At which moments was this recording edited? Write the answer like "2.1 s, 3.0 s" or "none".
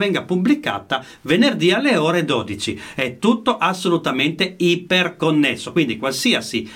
none